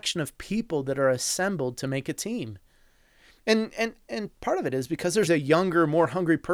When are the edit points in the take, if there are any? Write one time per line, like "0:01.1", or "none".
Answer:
0:03.3
0:05.3